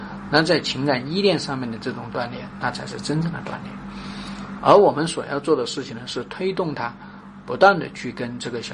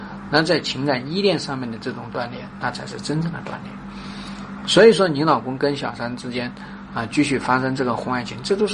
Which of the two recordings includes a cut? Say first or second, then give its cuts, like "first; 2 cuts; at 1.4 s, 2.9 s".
first; 1 cut; at 4.6 s